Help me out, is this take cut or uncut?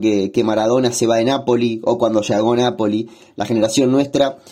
uncut